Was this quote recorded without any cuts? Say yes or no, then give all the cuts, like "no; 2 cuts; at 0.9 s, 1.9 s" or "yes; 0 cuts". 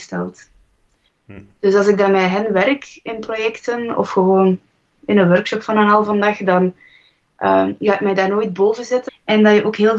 no; 2 cuts; at 1.1 s, 9.1 s